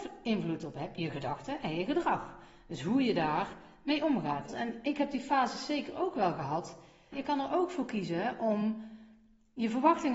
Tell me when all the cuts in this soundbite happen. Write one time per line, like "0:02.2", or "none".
0:04.5
0:07.1

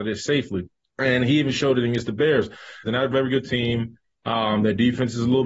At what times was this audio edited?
0:02.8

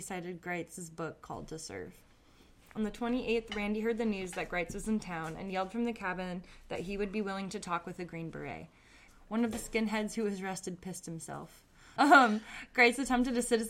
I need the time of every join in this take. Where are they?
0:09.1
0:12.0

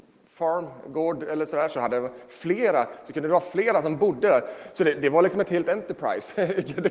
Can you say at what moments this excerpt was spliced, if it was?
none

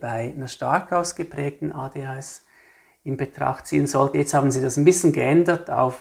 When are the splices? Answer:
none

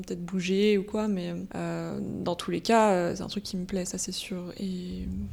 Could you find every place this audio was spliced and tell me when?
none

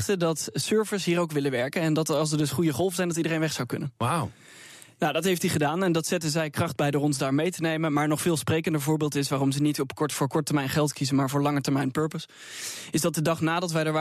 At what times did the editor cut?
none

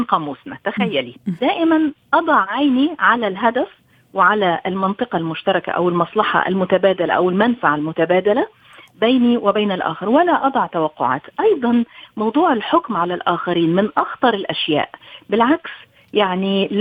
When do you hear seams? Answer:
0:01.4

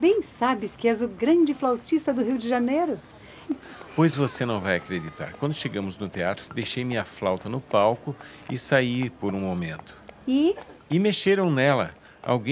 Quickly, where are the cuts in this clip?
0:03.5

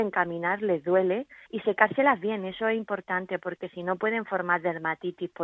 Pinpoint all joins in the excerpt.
0:01.5

